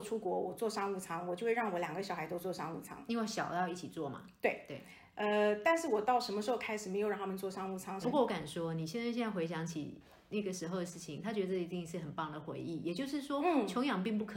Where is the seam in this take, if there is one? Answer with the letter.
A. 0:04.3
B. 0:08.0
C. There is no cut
B